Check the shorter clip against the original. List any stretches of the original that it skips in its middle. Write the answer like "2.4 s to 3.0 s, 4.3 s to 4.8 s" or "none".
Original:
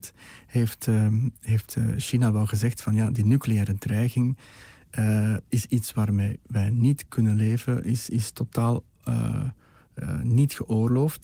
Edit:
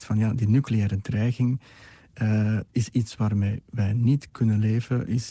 none